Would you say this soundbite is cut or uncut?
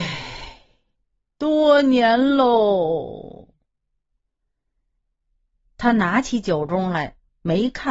uncut